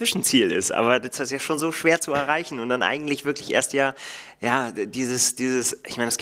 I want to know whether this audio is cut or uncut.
uncut